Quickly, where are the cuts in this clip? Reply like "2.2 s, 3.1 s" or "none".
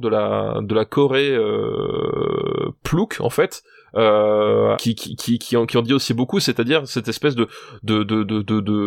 4.7 s